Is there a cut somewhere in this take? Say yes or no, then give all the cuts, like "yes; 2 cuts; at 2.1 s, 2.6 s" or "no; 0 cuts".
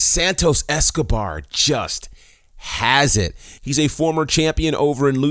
no; 0 cuts